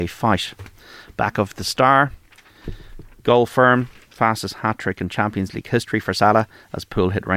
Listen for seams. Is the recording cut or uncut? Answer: uncut